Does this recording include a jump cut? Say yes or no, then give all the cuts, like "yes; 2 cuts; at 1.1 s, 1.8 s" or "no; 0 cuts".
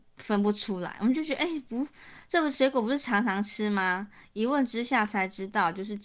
no; 0 cuts